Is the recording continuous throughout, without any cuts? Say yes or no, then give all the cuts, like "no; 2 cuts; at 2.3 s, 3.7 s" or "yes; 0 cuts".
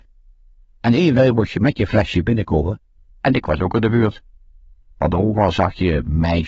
no; 1 cut; at 4.8 s